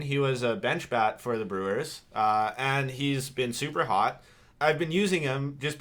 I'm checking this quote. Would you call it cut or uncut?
cut